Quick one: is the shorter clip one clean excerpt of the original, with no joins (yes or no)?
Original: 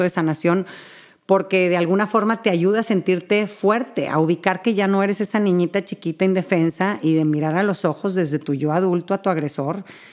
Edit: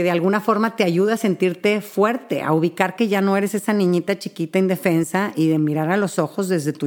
yes